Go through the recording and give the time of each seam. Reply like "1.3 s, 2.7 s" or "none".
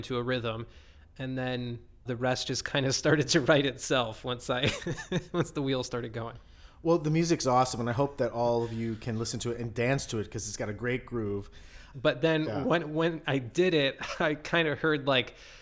2.1 s, 11.9 s